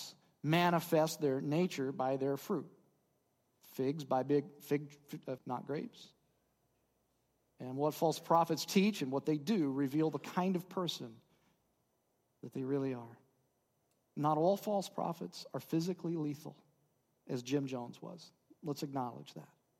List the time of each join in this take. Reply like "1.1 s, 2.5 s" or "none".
5.4 s

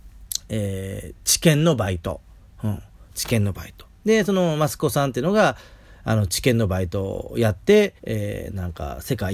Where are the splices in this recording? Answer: 8.0 s

